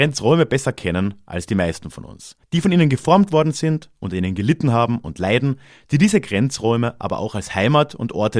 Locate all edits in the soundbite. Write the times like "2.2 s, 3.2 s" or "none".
2.4 s